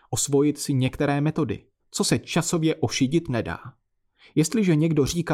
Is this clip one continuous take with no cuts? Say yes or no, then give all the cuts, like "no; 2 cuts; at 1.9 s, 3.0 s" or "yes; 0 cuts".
no; 1 cut; at 1.8 s